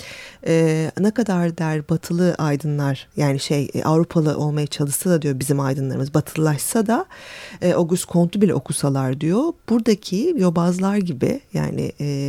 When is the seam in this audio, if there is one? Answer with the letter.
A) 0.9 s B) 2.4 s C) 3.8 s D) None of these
D